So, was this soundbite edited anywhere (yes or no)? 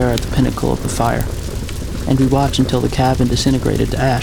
no